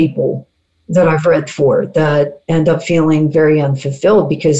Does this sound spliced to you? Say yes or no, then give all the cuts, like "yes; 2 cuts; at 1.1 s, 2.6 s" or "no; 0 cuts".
no; 0 cuts